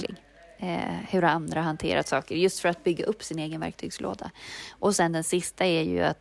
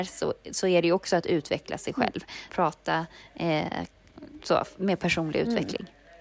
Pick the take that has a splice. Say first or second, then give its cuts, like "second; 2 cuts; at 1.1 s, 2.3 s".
second; 2 cuts; at 2.5 s, 4.8 s